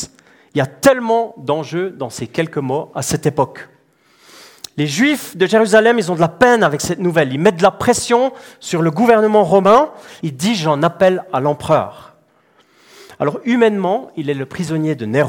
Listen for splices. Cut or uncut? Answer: cut